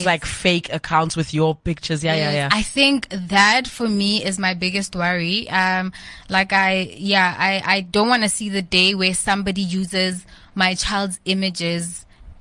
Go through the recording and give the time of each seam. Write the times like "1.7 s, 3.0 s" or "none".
none

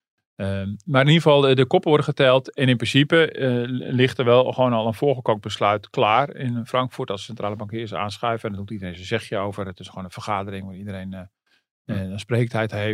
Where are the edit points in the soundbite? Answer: none

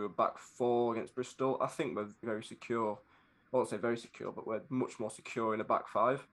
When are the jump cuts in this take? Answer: 2.2 s

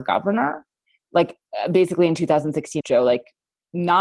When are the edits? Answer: 2.8 s

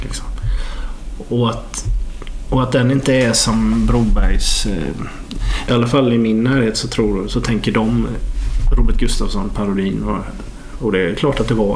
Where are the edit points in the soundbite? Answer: 5.7 s, 10.7 s

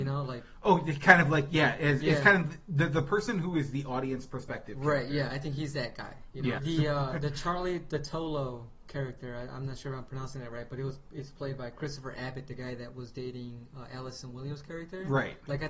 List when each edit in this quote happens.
6.6 s

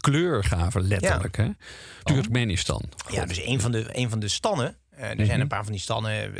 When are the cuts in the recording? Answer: 2.1 s

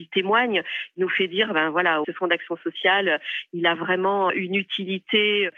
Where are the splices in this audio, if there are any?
2.0 s

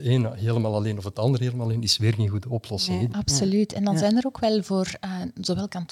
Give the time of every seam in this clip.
3.1 s

